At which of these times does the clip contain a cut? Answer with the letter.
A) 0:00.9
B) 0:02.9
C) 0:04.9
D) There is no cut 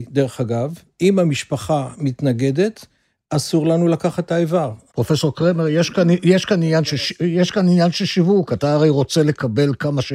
C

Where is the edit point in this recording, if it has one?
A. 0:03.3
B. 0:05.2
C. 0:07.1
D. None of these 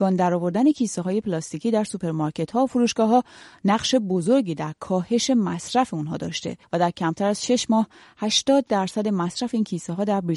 D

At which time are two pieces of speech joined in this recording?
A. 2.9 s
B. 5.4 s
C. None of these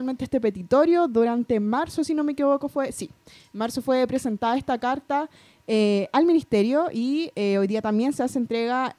C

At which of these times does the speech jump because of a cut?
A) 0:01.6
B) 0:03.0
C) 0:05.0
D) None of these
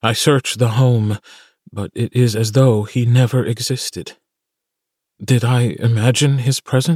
D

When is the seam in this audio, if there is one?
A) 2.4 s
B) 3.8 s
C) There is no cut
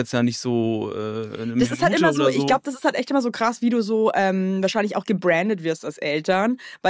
C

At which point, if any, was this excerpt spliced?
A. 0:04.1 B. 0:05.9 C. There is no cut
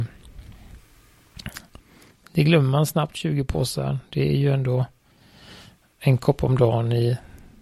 C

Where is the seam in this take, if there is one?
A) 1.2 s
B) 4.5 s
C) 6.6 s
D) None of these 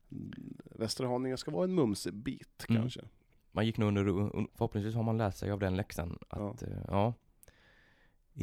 B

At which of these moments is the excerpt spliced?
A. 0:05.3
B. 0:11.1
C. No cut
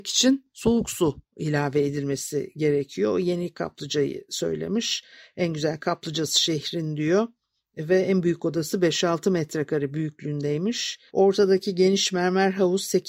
B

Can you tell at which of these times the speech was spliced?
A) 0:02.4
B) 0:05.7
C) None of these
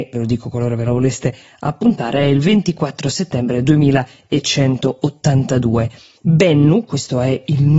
C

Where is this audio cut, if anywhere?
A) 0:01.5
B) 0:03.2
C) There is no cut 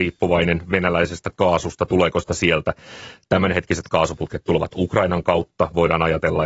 C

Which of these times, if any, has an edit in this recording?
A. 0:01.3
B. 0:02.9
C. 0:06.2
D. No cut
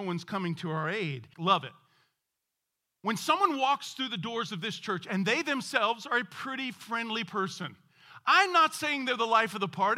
A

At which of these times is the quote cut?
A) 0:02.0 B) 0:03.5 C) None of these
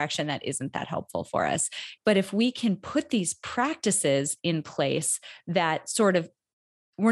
A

